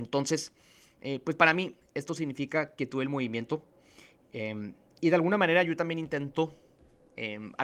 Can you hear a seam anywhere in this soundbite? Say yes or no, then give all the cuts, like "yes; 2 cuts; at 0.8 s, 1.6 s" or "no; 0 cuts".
no; 0 cuts